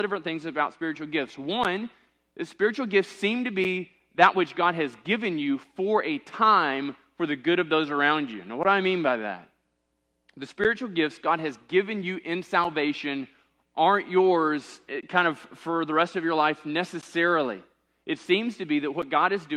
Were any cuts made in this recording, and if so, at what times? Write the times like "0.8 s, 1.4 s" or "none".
14.9 s